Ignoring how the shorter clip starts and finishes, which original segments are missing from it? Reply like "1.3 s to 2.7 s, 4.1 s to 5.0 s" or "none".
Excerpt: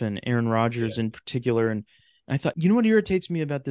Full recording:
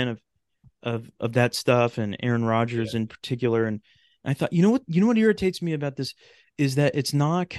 4.5 s to 4.9 s